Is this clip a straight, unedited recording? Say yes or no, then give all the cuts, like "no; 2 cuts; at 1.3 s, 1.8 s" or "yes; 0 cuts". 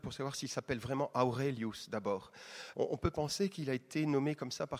no; 1 cut; at 2.7 s